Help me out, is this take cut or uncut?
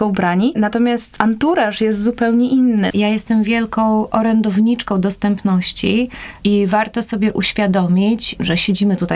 cut